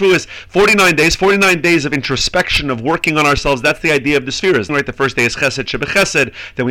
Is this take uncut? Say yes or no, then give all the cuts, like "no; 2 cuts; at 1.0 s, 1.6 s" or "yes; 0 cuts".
no; 1 cut; at 4.7 s